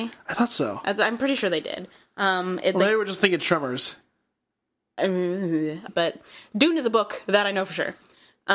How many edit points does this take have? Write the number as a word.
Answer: one